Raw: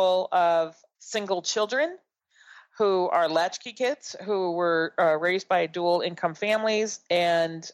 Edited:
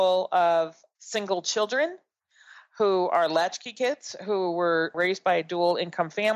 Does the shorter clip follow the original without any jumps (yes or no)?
no